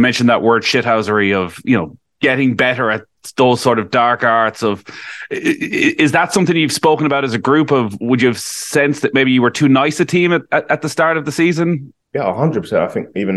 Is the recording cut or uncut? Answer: cut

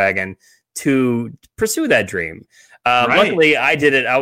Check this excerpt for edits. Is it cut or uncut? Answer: uncut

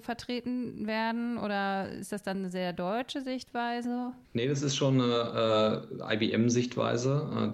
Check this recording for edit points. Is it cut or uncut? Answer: cut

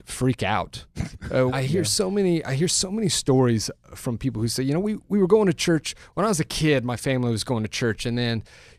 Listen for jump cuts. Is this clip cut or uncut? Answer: cut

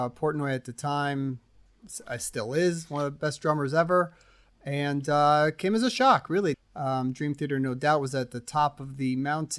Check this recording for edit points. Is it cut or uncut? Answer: cut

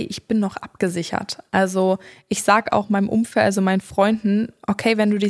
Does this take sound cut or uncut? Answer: uncut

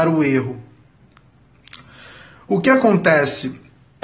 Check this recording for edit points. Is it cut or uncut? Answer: uncut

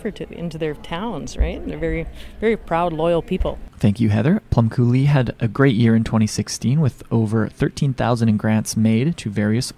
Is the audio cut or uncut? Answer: uncut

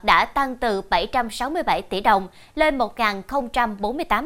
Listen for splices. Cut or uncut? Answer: uncut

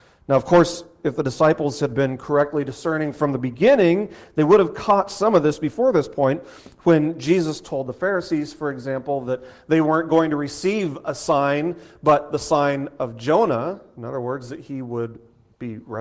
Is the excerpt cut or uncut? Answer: uncut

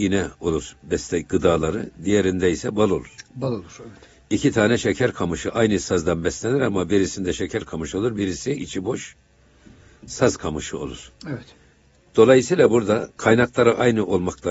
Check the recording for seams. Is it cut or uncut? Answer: uncut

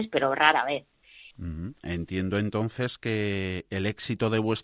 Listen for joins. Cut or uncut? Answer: cut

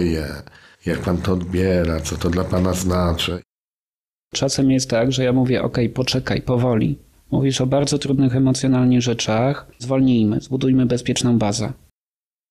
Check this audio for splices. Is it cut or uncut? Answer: uncut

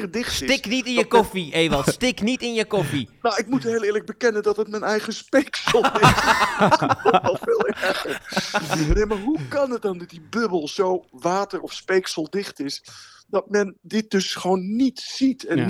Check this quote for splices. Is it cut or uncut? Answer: uncut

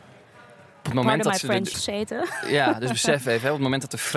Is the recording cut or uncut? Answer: cut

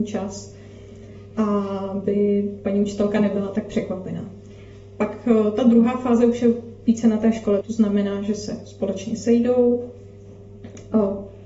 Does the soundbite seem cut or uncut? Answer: cut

